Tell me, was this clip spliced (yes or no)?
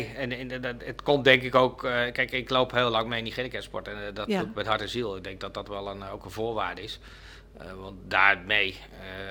no